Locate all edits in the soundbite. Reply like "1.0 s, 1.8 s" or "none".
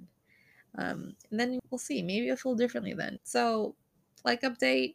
1.6 s, 3.2 s